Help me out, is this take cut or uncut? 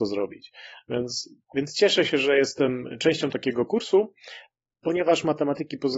cut